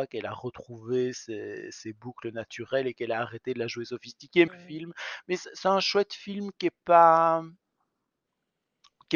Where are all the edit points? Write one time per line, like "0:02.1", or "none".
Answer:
0:04.5